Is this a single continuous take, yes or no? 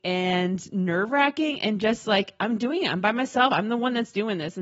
yes